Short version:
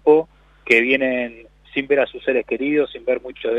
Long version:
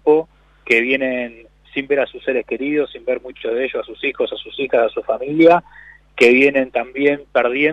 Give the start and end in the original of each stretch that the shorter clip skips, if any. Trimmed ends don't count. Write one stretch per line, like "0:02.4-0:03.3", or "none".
none